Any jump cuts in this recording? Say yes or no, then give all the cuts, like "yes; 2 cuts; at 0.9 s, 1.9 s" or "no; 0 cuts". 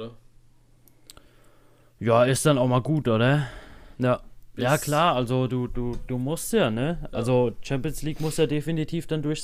yes; 1 cut; at 3.9 s